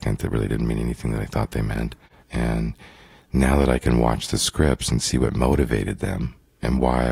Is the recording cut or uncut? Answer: cut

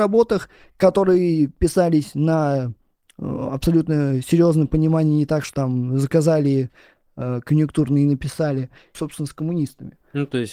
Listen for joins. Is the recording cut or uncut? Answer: cut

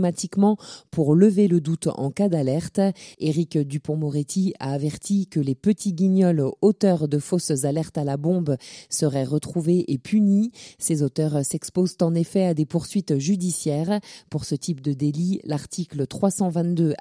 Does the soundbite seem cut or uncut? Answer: cut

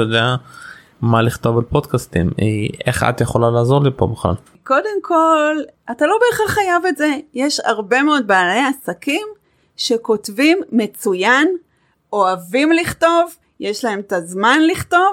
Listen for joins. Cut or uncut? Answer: uncut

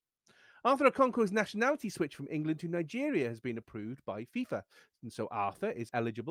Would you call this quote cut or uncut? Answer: uncut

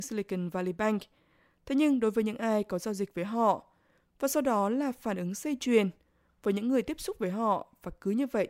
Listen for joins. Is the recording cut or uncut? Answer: uncut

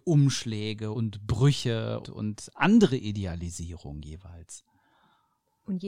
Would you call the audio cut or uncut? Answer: cut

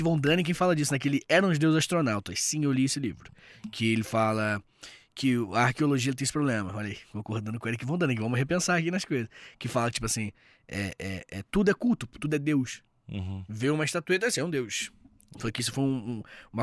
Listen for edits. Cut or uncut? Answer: uncut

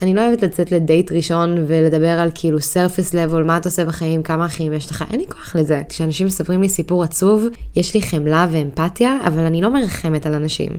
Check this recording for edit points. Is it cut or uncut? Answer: cut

